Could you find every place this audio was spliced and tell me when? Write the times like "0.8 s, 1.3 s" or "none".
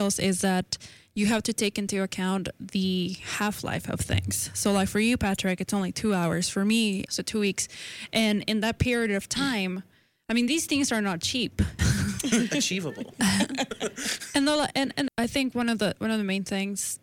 7.1 s, 11.8 s, 15.1 s